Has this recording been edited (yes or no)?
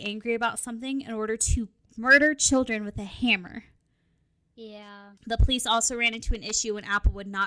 yes